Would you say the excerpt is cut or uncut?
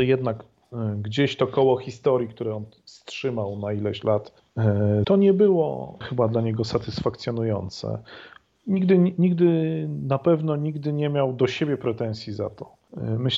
cut